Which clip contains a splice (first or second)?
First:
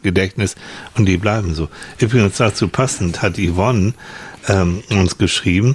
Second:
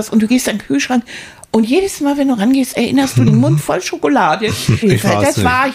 second